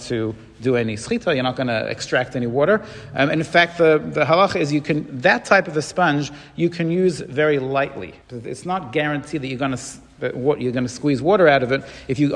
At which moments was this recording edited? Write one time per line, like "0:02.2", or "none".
0:08.2